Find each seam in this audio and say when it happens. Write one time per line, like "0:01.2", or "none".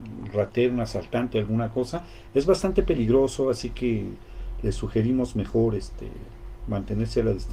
none